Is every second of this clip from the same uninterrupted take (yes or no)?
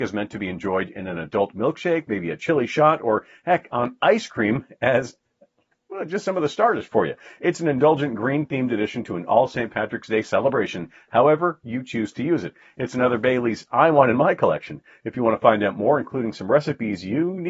yes